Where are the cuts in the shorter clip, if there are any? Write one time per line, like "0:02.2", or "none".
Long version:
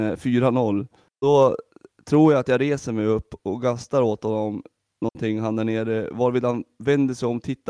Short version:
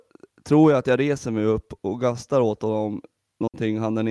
none